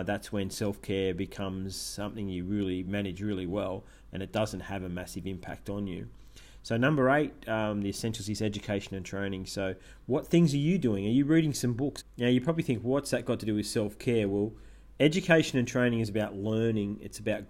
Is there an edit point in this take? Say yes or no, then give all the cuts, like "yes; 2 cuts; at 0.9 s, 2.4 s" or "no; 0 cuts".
yes; 1 cut; at 12.0 s